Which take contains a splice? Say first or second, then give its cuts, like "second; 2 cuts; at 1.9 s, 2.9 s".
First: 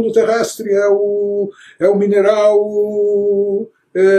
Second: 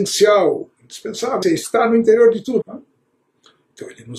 second; 2 cuts; at 1.4 s, 2.6 s